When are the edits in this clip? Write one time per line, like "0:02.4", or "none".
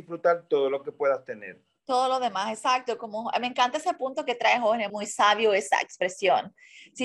0:04.9